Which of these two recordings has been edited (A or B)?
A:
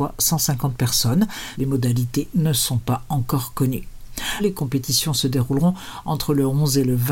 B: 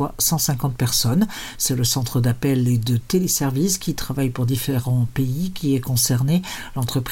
A